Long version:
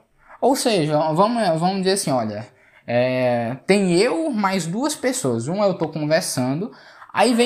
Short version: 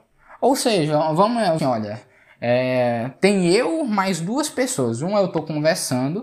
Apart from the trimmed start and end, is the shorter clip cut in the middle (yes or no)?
yes